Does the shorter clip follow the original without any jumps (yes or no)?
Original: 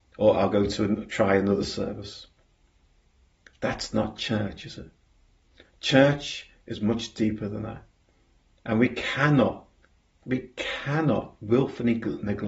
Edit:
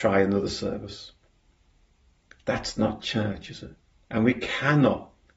no